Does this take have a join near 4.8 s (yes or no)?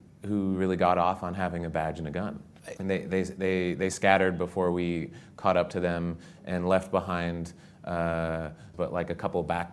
no